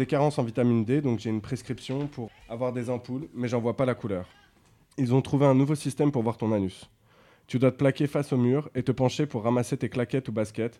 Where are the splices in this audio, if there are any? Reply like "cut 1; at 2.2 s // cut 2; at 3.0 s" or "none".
cut 1; at 2.3 s // cut 2; at 4.9 s